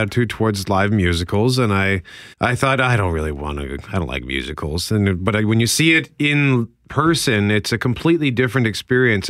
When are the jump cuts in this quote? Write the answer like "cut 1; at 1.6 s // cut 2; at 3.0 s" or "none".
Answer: cut 1; at 2.3 s